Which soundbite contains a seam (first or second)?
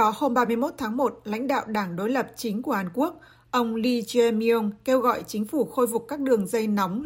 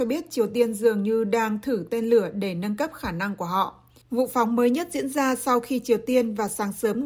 second